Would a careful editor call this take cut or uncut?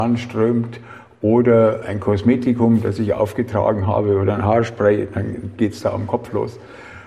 uncut